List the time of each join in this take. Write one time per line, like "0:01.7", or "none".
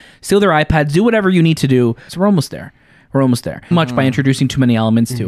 0:02.1
0:03.7